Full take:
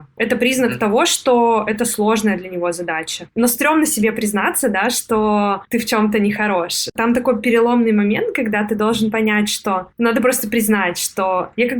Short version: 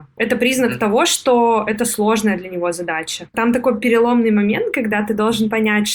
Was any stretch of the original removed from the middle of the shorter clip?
yes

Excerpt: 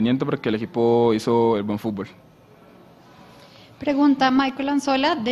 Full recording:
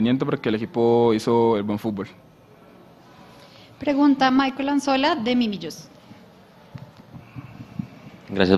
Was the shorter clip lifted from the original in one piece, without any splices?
yes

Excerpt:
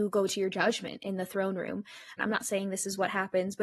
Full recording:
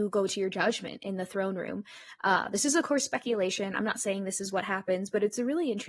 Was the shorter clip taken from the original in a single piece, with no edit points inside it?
no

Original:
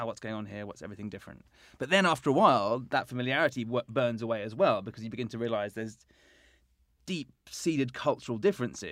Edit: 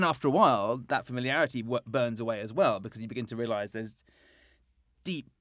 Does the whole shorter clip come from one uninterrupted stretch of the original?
yes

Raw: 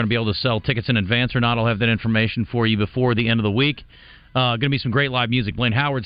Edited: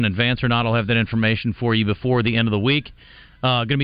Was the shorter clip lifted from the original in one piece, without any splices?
yes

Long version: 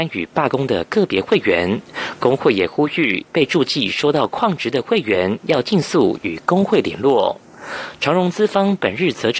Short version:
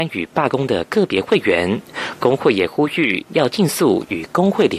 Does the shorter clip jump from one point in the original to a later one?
yes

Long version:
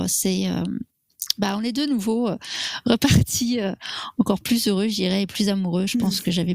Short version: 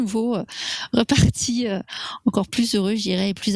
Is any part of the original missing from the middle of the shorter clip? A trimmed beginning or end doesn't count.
no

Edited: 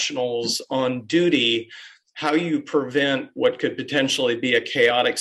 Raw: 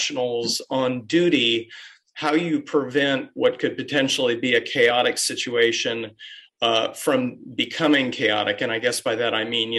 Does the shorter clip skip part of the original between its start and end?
no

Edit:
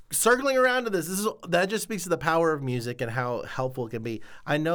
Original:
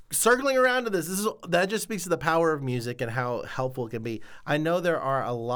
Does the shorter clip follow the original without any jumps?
yes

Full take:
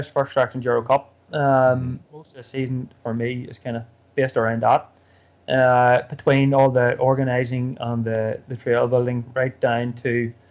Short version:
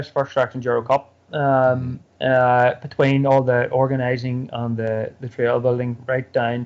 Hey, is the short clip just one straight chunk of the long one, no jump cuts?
no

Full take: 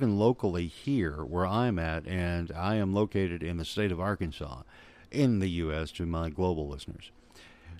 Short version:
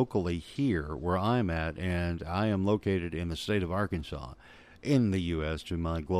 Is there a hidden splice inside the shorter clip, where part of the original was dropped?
no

